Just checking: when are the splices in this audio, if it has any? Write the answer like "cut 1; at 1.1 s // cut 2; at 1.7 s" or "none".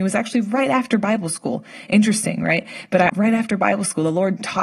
cut 1; at 3.1 s